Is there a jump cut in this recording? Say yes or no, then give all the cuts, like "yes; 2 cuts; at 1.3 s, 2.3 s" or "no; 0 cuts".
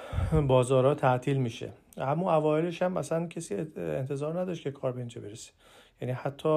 no; 0 cuts